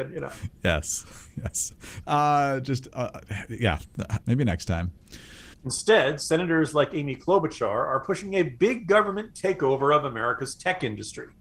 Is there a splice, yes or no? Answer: yes